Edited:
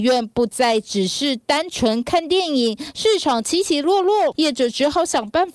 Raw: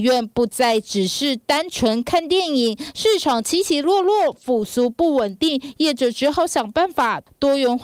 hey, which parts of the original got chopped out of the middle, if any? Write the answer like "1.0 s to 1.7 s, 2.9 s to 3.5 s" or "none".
4.3 s to 5.7 s